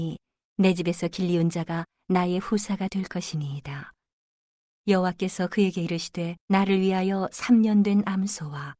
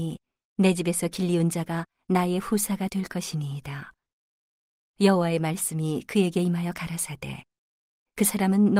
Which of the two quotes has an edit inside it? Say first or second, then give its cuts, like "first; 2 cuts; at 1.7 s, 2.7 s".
first; 2 cuts; at 4.8 s, 6.4 s